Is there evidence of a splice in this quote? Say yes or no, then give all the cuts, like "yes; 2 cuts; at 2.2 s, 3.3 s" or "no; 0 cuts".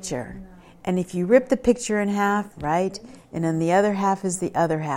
yes; 1 cut; at 2.5 s